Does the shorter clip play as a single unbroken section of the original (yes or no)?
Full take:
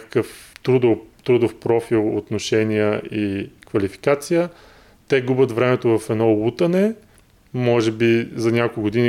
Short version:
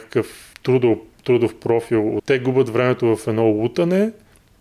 no